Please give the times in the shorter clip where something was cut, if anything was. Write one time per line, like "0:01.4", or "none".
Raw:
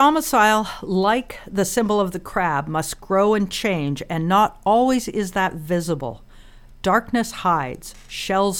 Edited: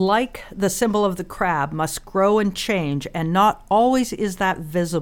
none